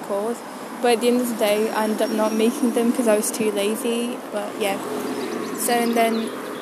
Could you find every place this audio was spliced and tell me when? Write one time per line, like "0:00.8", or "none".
0:04.2